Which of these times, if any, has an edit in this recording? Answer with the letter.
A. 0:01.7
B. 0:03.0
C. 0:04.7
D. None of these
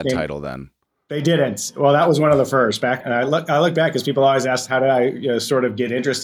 B